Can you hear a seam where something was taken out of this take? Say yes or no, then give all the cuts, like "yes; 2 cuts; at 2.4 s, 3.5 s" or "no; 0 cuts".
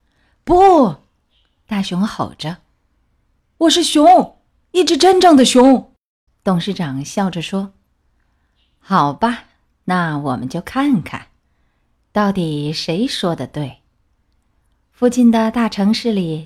yes; 1 cut; at 6.3 s